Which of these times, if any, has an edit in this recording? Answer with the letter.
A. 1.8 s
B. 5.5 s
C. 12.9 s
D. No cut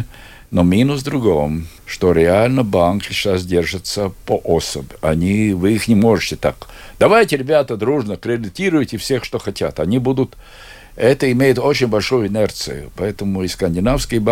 A